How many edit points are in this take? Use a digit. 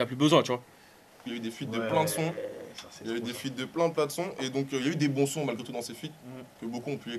1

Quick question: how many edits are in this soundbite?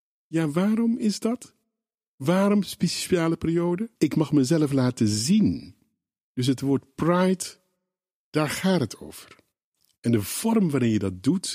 1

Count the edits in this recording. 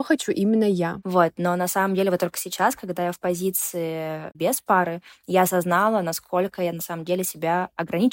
1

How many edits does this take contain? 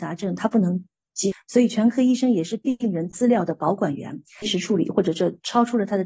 2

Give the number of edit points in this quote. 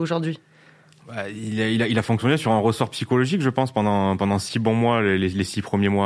0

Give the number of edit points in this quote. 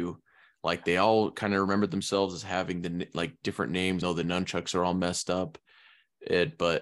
1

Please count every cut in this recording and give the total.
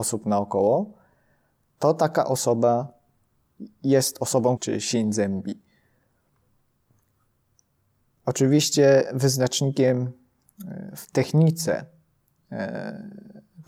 1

